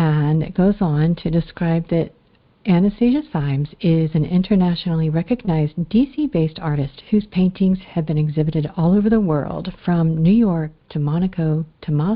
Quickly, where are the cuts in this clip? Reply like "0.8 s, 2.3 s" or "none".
none